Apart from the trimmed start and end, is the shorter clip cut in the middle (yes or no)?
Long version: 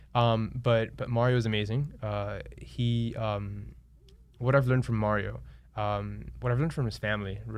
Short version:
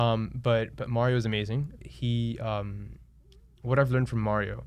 yes